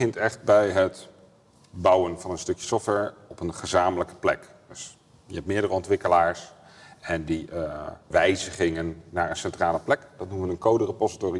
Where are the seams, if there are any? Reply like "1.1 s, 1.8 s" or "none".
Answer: 8.1 s